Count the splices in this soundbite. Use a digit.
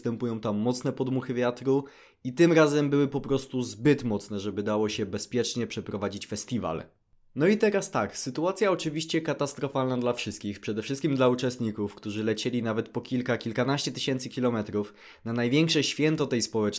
0